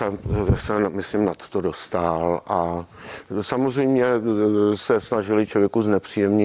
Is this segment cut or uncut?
uncut